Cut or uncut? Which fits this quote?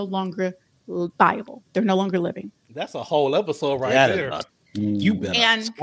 uncut